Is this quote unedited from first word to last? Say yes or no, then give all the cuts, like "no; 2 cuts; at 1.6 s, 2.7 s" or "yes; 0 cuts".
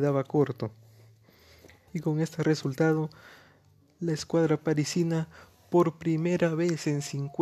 no; 1 cut; at 1.9 s